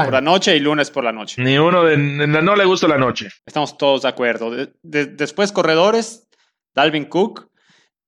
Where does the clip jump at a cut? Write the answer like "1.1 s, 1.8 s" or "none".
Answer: 3.4 s